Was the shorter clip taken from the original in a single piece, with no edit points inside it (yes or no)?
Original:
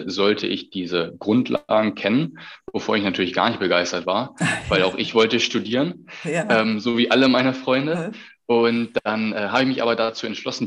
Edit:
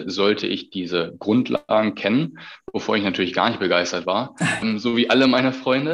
no